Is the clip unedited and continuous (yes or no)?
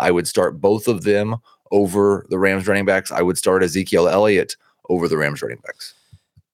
yes